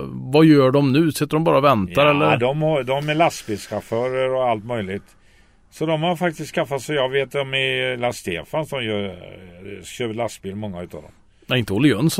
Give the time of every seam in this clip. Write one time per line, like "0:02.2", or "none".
none